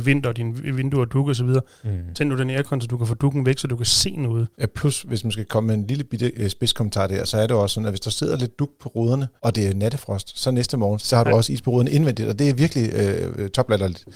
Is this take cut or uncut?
cut